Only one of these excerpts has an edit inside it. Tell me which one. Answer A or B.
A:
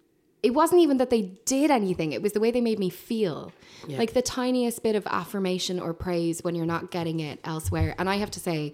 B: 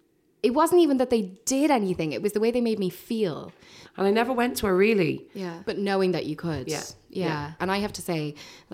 B